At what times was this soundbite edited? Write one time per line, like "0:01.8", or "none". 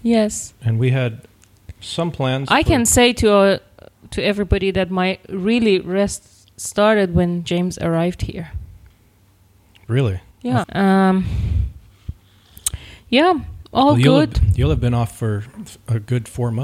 0:10.6